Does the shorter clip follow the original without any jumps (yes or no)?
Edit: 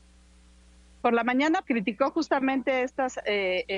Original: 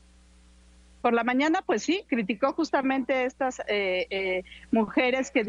no